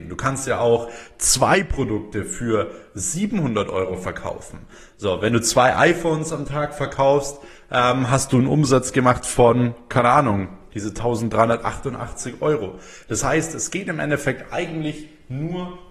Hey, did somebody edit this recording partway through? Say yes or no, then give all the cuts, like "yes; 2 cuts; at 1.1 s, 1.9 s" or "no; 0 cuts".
yes; 1 cut; at 10.7 s